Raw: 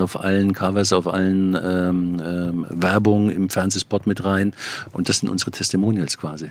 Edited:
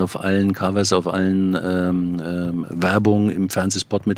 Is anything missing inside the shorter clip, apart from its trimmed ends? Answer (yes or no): no